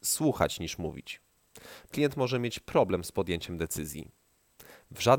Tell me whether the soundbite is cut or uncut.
cut